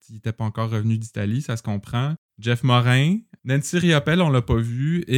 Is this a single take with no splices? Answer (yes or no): no